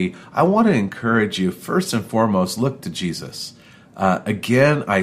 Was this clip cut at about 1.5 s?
no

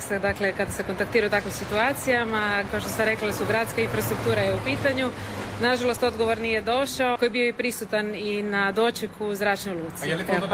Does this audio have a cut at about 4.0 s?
no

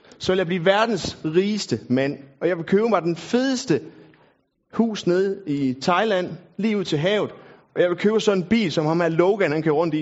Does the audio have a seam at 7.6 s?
no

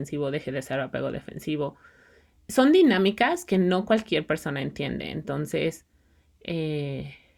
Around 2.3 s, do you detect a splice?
no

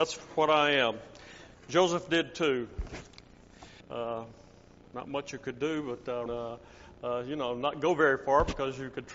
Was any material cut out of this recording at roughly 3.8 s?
yes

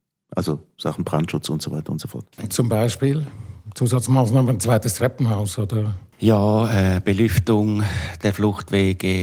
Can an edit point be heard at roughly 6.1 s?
yes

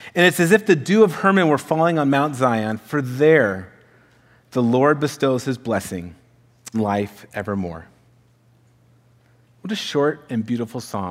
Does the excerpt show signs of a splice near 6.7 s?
yes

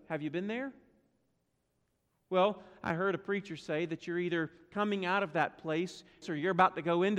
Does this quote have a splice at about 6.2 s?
yes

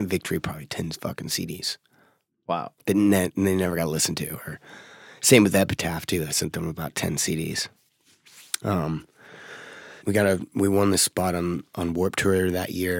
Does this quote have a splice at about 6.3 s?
no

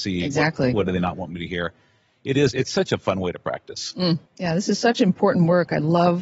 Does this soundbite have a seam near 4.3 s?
yes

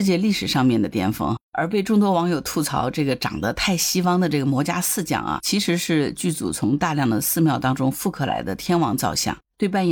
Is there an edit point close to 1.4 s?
yes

